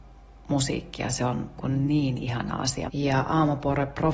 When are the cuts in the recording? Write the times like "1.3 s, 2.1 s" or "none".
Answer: 1.6 s, 2.9 s